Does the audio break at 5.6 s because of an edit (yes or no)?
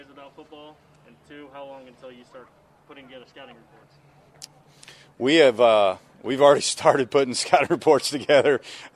no